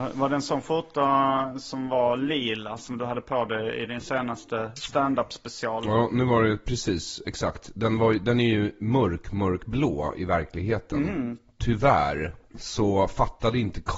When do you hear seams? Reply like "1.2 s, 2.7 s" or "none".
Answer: 12.5 s